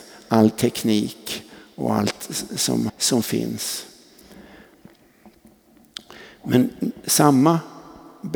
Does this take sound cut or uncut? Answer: cut